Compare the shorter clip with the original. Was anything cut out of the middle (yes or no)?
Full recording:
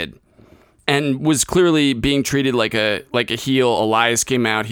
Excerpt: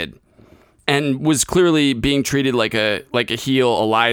no